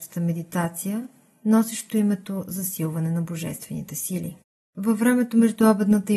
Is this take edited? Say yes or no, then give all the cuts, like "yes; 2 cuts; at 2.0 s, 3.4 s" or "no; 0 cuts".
no; 0 cuts